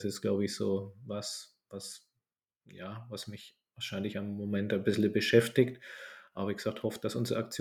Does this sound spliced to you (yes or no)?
no